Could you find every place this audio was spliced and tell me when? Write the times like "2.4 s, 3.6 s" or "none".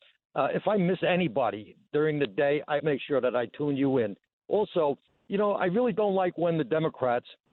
2.8 s